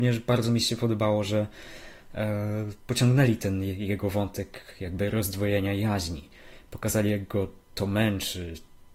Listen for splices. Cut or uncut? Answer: uncut